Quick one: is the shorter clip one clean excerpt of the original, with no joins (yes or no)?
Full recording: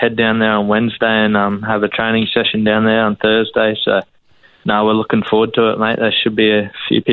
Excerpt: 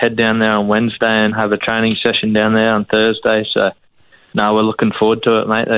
no